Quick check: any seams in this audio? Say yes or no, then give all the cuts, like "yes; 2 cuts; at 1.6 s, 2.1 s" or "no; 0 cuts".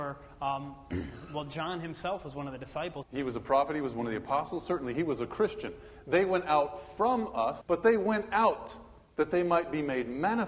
yes; 2 cuts; at 3.0 s, 7.6 s